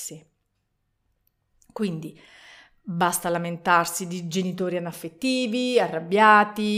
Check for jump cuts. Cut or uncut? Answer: uncut